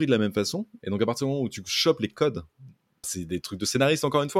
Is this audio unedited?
no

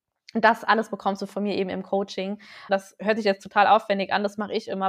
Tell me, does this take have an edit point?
yes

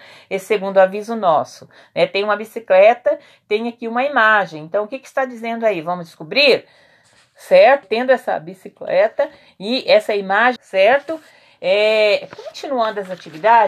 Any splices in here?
yes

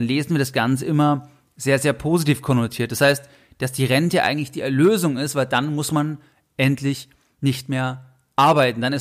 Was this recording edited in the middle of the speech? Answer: no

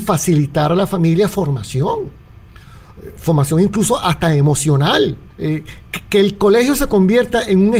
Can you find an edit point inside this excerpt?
yes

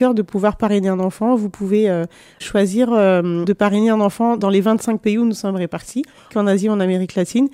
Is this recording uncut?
no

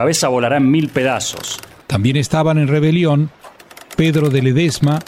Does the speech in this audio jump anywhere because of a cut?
yes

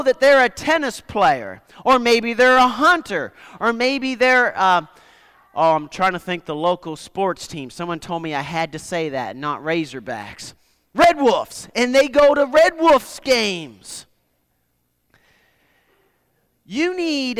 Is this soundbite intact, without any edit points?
yes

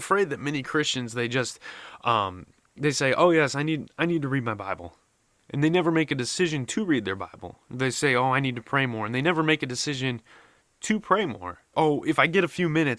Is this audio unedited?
no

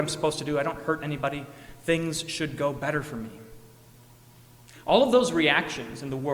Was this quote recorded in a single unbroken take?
yes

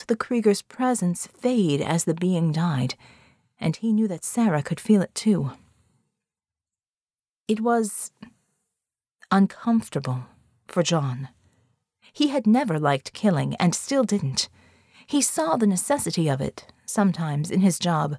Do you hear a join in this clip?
no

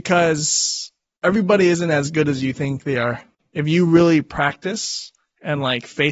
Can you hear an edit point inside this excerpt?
yes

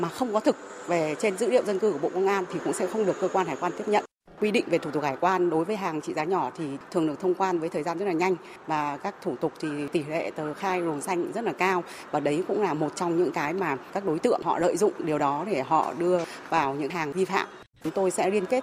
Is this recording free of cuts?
no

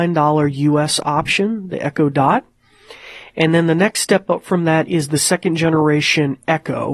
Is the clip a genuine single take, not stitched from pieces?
yes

